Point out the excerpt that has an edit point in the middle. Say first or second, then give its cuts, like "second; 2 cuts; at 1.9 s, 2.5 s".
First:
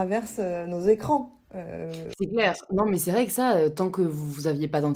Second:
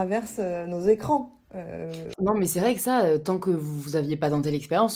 second; 1 cut; at 2.1 s